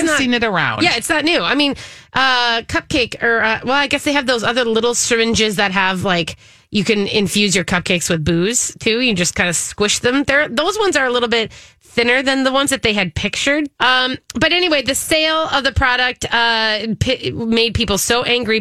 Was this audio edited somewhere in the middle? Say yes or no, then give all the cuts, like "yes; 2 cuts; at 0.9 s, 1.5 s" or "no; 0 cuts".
yes; 1 cut; at 13.8 s